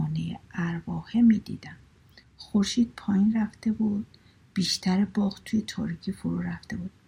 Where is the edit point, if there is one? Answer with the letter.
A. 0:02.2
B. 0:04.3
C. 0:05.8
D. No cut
A